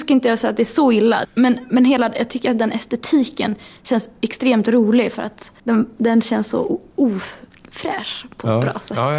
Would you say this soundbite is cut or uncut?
cut